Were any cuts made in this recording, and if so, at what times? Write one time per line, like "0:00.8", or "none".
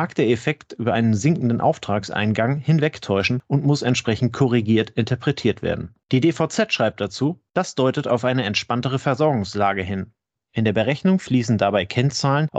0:06.0
0:10.3